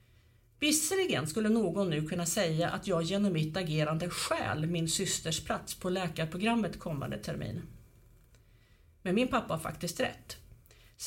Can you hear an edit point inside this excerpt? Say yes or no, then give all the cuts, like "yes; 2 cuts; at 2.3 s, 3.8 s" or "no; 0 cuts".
no; 0 cuts